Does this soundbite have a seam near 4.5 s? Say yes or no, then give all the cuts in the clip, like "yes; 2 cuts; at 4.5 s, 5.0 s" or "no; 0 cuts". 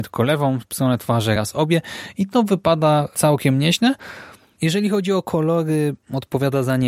no; 1 cut; at 1.4 s